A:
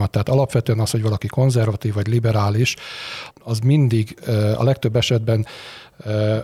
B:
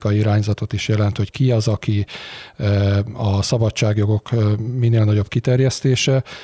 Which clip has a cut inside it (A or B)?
A